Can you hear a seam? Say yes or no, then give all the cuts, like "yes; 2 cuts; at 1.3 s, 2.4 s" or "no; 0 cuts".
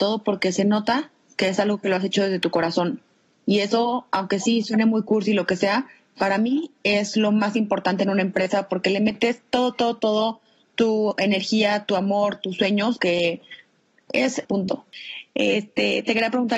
yes; 2 cuts; at 13.0 s, 14.4 s